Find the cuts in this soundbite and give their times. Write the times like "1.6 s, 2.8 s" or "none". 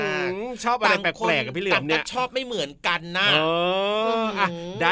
none